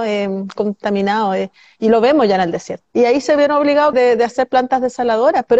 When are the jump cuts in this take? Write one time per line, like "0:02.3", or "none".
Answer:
0:02.8
0:03.9